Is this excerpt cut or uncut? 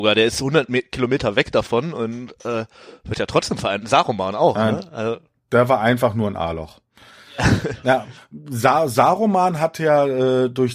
uncut